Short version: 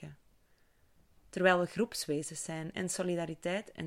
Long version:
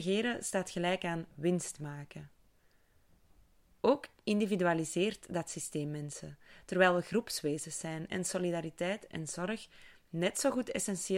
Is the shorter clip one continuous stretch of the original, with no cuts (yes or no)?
no